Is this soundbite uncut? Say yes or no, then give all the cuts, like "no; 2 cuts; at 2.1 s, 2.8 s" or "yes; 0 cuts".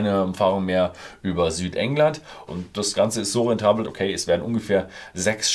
no; 2 cuts; at 2.5 s, 3.8 s